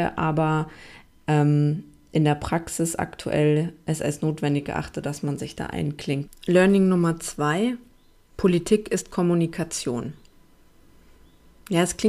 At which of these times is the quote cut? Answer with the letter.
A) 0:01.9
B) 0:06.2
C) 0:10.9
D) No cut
B